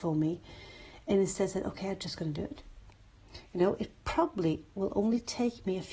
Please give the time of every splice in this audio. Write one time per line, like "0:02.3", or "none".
none